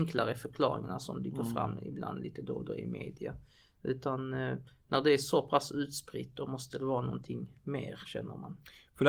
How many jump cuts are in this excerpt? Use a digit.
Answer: 0